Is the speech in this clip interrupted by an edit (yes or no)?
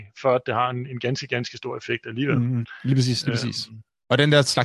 no